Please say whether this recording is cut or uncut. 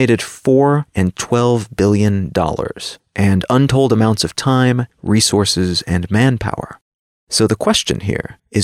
uncut